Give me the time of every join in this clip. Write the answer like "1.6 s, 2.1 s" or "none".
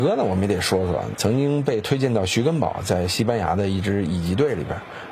1.1 s